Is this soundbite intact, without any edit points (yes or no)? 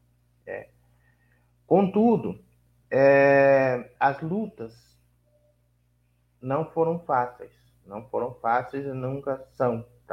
no